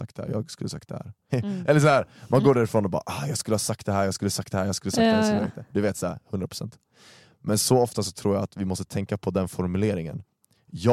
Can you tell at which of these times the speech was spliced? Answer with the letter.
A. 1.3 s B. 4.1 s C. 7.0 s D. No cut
A